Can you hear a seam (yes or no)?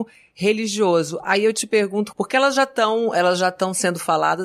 yes